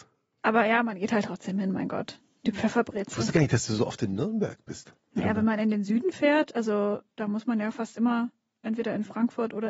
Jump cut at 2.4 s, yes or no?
no